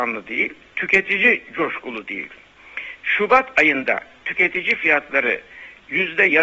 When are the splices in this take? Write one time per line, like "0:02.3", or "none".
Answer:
0:03.0